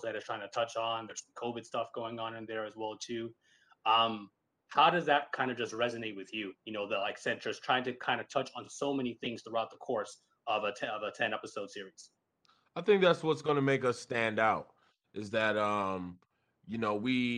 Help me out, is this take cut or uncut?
uncut